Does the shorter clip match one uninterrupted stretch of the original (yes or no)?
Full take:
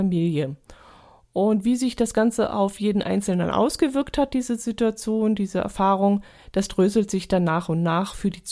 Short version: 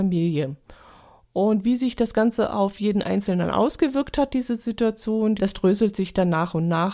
no